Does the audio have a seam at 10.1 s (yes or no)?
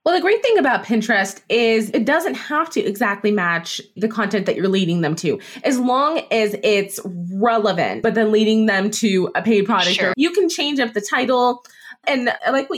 yes